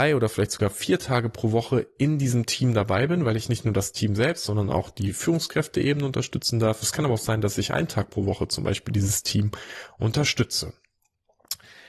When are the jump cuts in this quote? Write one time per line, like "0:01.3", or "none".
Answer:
none